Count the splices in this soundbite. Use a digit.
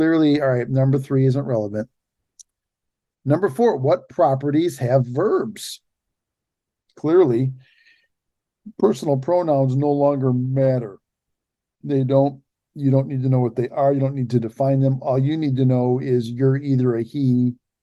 1